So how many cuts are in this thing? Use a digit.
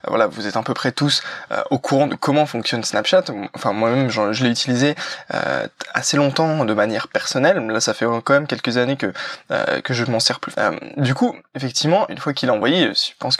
2